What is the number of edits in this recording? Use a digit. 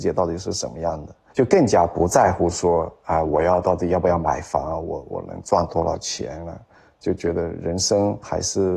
0